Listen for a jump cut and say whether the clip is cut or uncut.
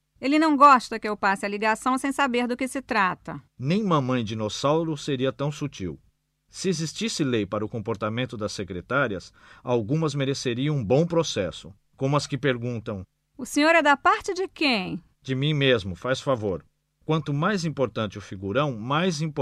cut